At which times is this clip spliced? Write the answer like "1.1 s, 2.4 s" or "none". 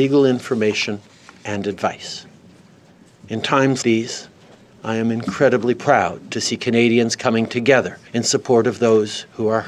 3.8 s, 8.1 s